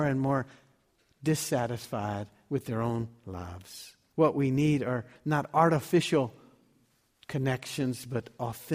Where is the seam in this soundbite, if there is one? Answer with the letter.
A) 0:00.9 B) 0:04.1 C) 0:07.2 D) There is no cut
B